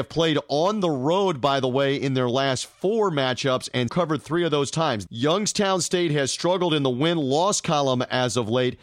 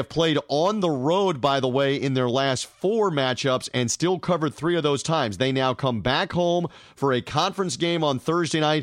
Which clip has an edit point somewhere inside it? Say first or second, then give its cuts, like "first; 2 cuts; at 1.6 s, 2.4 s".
first; 2 cuts; at 3.9 s, 5.1 s